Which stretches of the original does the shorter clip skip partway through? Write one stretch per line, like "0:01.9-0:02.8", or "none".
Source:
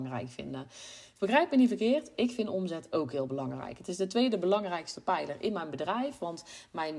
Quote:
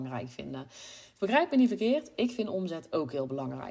none